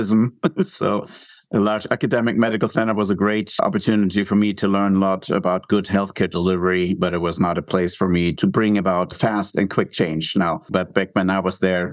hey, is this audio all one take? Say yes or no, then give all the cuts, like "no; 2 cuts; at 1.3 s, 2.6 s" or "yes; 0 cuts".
no; 1 cut; at 10.7 s